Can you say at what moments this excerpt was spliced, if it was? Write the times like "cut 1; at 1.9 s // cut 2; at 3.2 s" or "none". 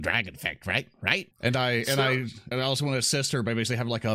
cut 1; at 1.3 s // cut 2; at 2.5 s

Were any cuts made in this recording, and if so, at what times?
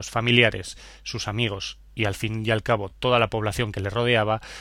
none

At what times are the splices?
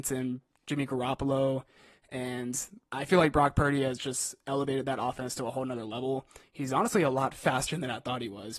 cut 1; at 2.9 s // cut 2; at 6.4 s

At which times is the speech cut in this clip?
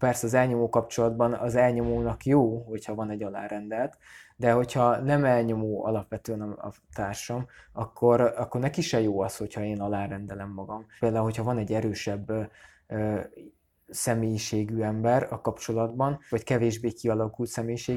cut 1; at 11.0 s // cut 2; at 16.3 s

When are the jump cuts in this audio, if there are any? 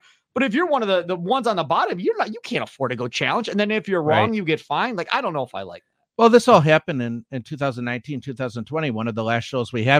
none

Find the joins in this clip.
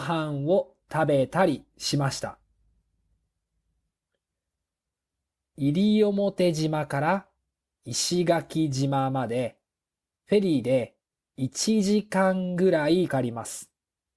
cut 1; at 13.1 s

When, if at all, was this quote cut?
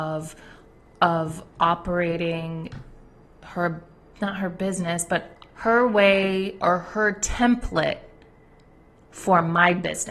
cut 1; at 5.5 s

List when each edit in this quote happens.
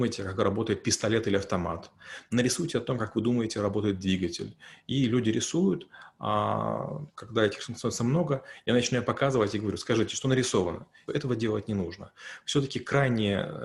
cut 1; at 11.1 s

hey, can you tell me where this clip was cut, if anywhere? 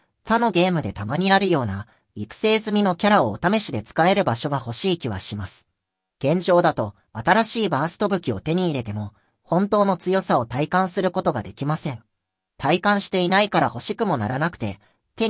cut 1; at 7.1 s

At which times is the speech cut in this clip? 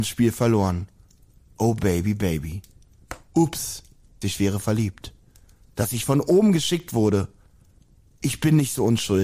cut 1; at 4.2 s

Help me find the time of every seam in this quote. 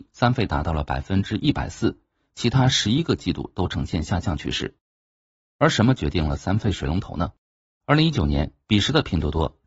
cut 1; at 7.8 s

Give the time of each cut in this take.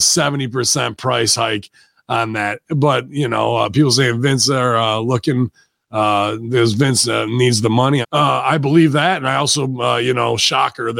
cut 1; at 8.0 s

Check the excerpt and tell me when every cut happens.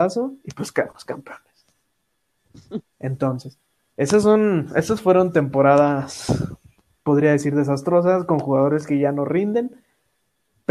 none

